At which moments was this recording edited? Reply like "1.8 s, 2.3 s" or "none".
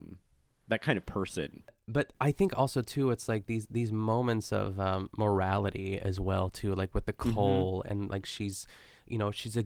none